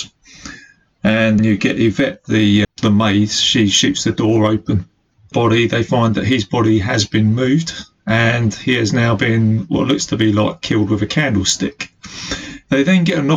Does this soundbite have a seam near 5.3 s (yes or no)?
yes